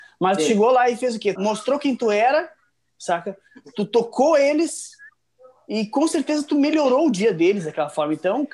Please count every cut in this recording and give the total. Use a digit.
1